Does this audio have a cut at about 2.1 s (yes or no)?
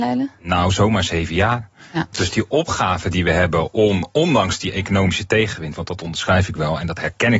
yes